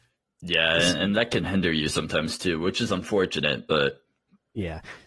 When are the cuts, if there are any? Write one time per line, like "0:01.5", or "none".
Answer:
none